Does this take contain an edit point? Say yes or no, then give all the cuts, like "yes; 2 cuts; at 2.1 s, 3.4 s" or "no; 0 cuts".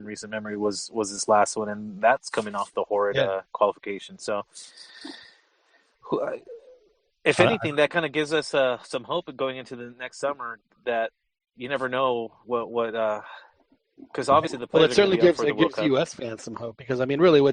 no; 0 cuts